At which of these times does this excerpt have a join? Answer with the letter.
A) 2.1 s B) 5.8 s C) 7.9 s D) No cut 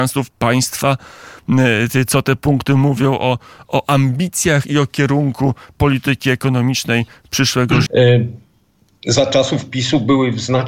C